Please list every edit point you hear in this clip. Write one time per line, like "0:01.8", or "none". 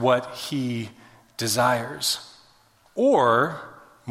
0:02.9